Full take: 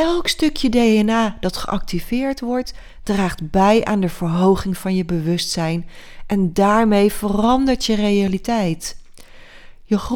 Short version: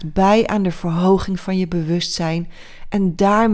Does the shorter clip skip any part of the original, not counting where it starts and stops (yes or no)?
no